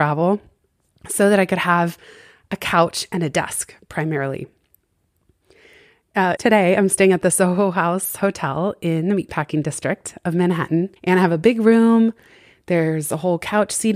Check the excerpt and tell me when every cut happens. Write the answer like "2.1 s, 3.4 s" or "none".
6.4 s, 11.0 s